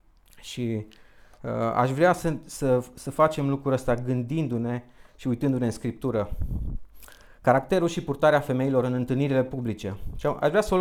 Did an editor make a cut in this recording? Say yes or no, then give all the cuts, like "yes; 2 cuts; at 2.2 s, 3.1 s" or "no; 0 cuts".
no; 0 cuts